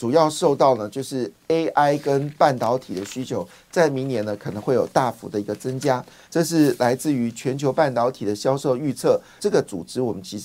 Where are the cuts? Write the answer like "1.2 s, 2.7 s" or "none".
6.2 s, 9.4 s